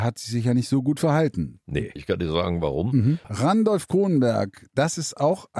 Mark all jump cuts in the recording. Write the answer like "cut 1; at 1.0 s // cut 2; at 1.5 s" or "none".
cut 1; at 2.0 s // cut 2; at 3.2 s